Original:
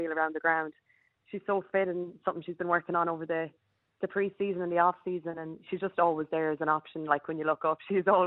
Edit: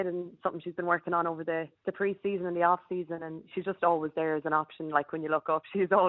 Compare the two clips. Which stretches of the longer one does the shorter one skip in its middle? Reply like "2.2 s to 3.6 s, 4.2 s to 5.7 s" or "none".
3.6 s to 3.9 s